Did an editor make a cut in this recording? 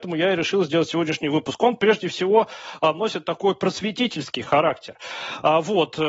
no; 0 cuts

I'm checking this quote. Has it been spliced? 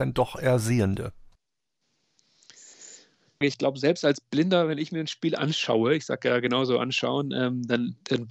yes; 1 cut; at 3.4 s

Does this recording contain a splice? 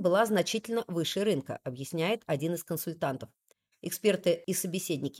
no; 0 cuts

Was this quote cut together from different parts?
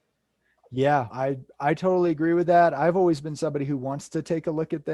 yes; 1 cut; at 1.1 s

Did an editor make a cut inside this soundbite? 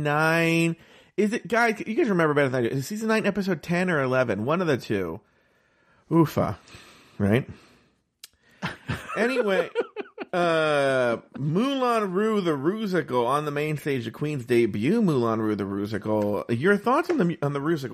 no; 0 cuts

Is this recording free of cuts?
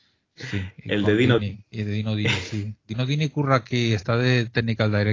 no; 1 cut; at 1.4 s

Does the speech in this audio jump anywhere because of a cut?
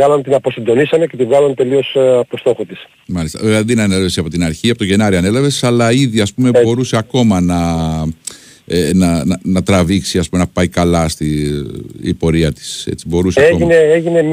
no; 0 cuts

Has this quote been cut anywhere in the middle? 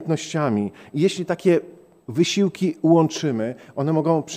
no; 0 cuts

